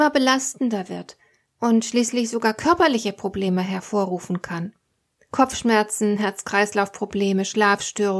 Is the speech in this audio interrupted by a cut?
no; 0 cuts

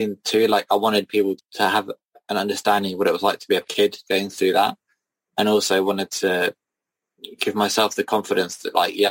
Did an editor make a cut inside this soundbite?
no; 0 cuts

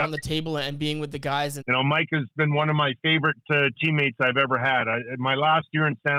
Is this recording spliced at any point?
yes; 1 cut; at 1.6 s

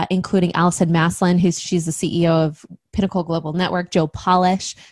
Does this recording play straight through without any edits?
yes; 0 cuts

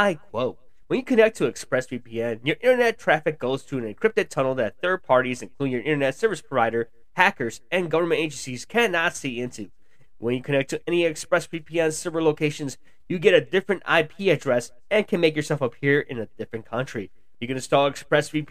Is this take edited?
yes; 2 cuts; at 10.0 s, 17.3 s

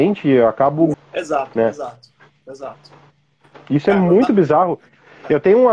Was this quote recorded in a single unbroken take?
no; 1 cut; at 0.9 s

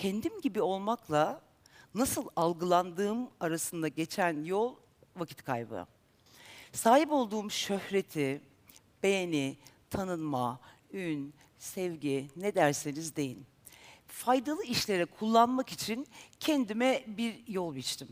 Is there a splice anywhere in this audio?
no; 0 cuts

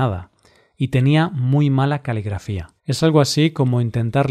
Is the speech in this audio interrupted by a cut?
yes; 1 cut; at 2.8 s

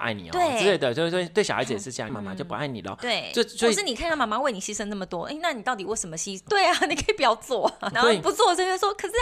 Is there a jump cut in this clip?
yes; 3 cuts; at 2.1 s, 6.5 s, 7.9 s

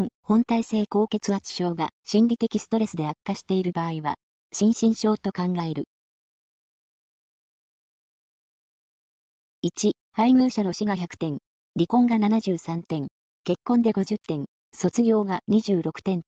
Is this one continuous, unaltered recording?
no; 2 cuts; at 10.0 s, 14.6 s

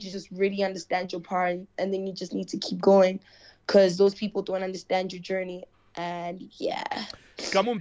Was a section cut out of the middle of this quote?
no; 0 cuts

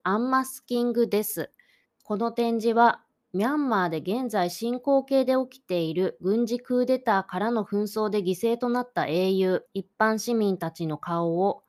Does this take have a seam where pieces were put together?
yes; 2 cuts; at 1.8 s, 9.7 s

